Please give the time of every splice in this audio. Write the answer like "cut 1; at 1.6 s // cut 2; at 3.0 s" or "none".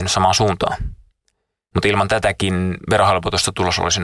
cut 1; at 1.7 s